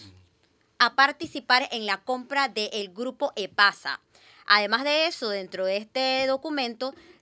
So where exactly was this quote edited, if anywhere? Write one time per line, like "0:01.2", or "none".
none

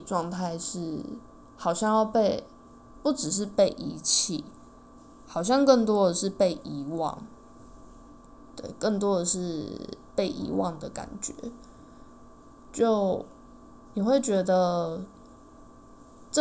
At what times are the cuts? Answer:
none

